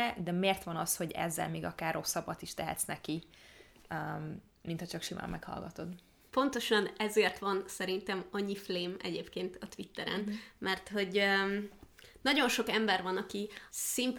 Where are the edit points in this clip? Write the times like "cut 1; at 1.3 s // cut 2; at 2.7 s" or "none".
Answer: none